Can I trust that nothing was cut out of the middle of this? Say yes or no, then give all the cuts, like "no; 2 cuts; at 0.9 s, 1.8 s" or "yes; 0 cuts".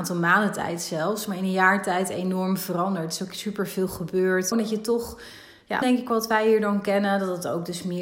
no; 2 cuts; at 4.5 s, 5.8 s